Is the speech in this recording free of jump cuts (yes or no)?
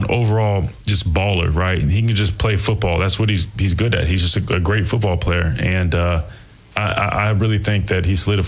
yes